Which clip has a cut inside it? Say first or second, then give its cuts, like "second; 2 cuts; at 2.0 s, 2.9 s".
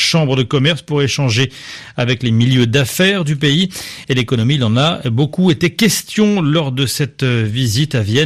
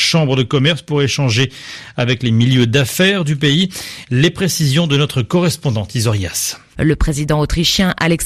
second; 2 cuts; at 4.0 s, 6.7 s